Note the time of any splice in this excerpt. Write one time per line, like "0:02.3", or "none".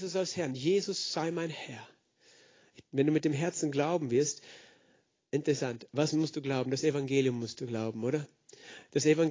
0:02.8